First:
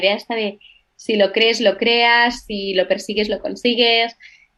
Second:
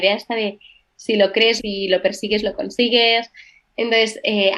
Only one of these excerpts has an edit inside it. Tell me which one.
second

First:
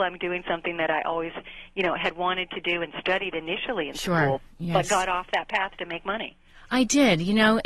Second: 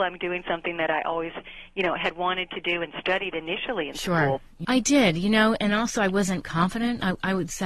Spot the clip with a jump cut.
second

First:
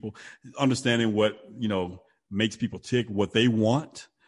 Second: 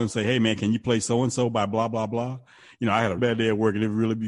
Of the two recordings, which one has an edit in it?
second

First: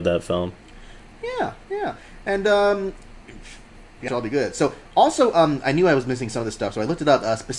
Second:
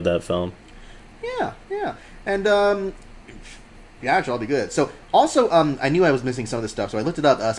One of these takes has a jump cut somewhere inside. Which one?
first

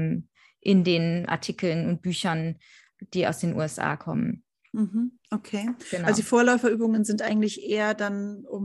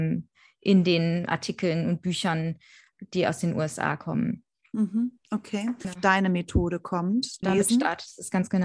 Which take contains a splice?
second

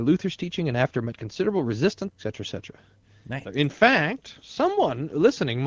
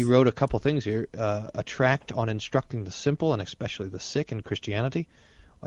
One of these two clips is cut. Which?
first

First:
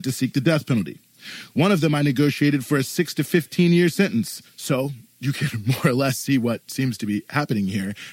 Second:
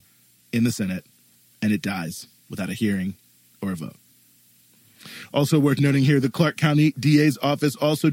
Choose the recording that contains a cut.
first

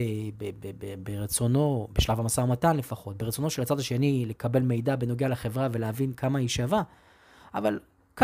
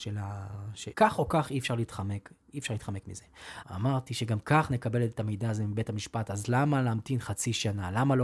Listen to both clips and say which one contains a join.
second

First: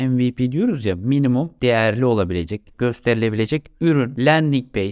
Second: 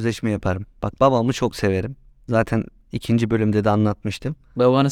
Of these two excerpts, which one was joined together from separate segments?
first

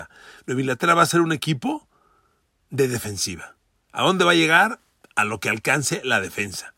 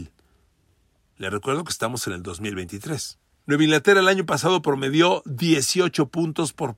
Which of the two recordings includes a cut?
second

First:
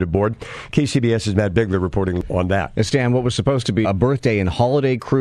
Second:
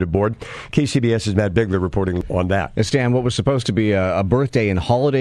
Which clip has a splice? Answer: first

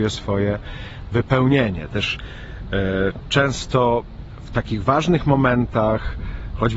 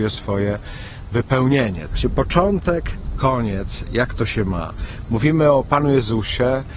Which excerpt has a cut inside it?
second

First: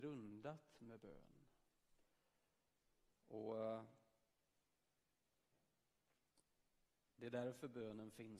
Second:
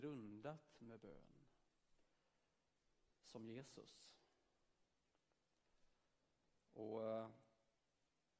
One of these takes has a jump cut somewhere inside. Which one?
first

